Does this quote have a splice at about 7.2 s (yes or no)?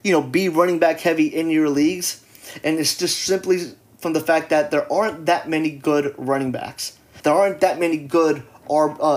yes